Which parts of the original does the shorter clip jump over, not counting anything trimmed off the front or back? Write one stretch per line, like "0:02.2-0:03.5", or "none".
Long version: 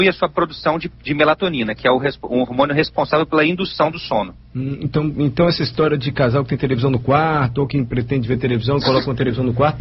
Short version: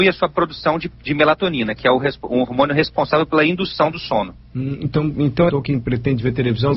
0:05.5-0:07.5